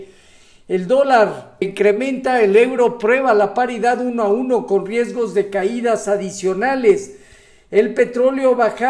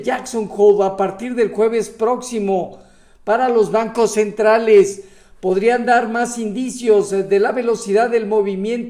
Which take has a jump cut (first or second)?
first